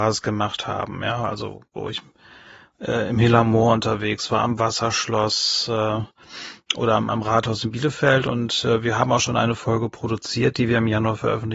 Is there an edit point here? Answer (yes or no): no